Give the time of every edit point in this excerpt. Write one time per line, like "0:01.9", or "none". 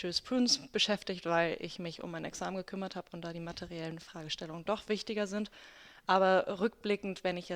none